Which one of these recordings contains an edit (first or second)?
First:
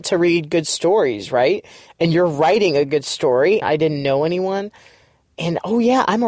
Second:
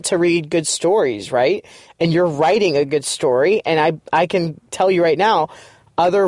first